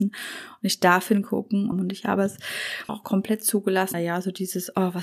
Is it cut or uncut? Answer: cut